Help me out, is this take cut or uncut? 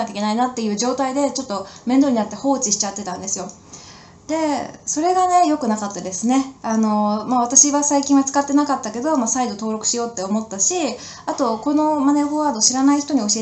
cut